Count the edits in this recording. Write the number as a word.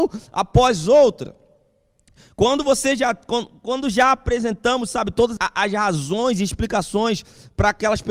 one